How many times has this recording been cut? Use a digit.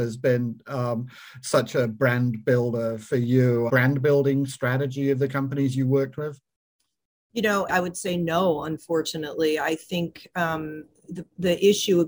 2